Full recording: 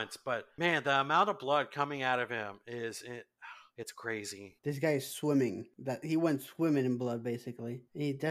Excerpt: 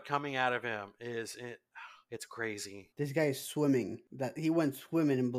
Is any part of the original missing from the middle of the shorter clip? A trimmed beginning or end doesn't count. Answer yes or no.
no